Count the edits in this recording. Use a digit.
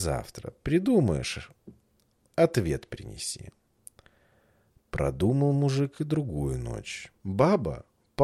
1